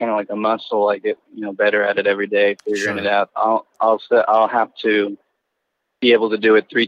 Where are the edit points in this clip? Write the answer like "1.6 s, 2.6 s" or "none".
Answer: 3.3 s